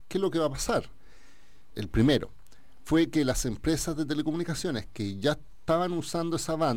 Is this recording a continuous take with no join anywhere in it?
no; 1 cut; at 1.7 s

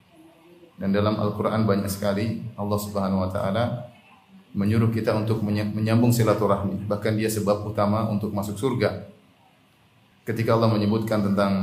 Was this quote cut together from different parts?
yes; 1 cut; at 10.1 s

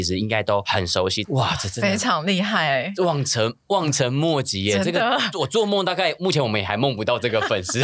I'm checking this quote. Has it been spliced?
yes; 1 cut; at 1.2 s

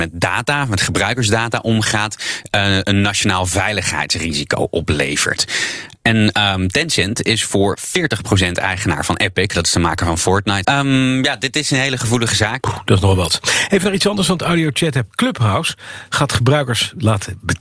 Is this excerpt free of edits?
no; 2 cuts; at 10.6 s, 12.6 s

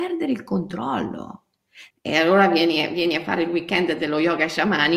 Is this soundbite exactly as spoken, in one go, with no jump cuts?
no; 1 cut; at 1.9 s

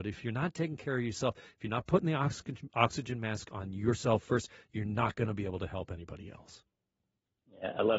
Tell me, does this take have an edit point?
no; 0 cuts

